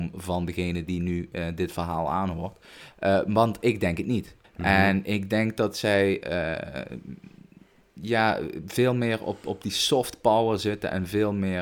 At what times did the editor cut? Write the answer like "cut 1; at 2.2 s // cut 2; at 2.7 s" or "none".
cut 1; at 4.4 s

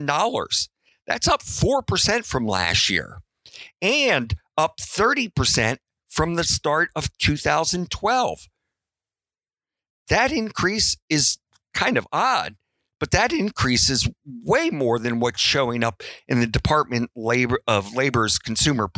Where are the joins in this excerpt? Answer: cut 1; at 11.0 s

